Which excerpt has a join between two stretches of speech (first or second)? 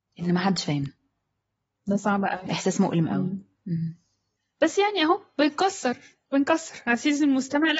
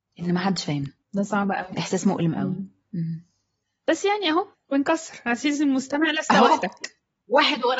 second